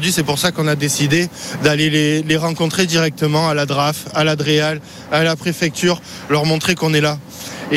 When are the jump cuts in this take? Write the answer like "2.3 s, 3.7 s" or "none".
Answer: none